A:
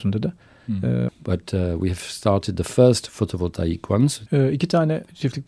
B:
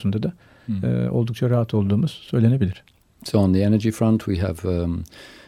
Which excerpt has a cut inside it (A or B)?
A